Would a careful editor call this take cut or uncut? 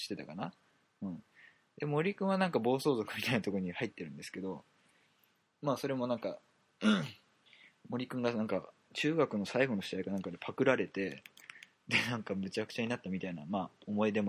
uncut